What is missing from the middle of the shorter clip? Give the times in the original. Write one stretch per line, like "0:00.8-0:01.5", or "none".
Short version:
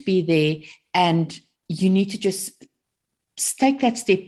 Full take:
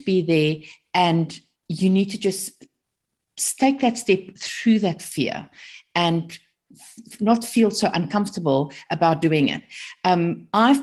none